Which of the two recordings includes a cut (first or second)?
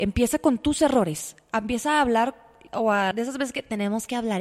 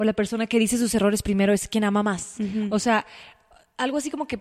first